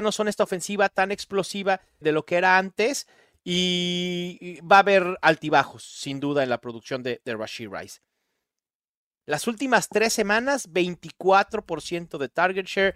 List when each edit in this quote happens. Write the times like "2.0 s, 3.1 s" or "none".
2.0 s, 9.1 s